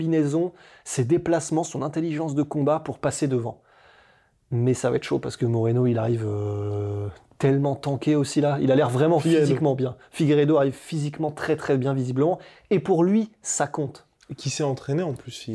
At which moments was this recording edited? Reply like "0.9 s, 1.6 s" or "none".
none